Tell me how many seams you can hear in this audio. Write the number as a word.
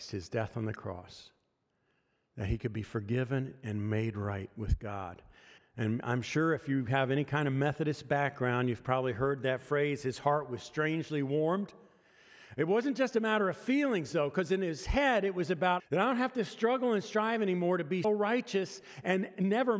three